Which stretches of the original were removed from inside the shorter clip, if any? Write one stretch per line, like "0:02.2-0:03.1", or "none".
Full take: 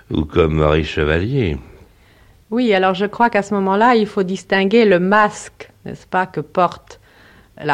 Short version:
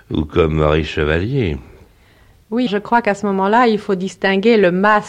0:02.7-0:02.9